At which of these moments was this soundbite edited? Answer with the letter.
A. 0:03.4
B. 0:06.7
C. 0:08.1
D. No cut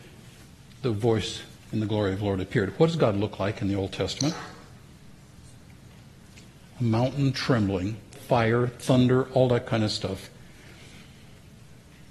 C